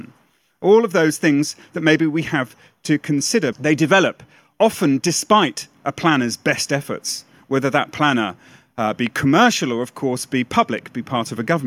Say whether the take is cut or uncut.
cut